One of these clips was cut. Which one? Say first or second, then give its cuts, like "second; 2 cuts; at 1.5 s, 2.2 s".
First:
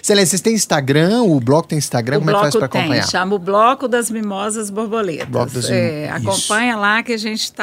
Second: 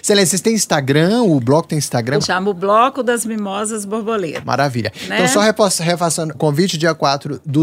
second; 3 cuts; at 2.2 s, 4.4 s, 6.3 s